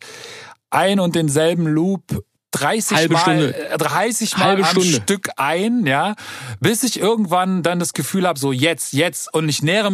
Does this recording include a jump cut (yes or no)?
yes